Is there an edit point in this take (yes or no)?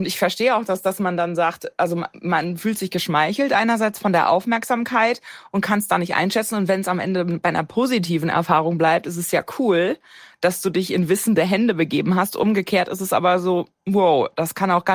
no